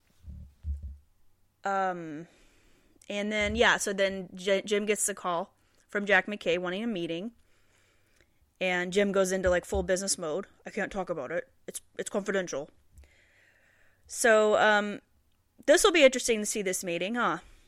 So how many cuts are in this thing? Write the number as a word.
zero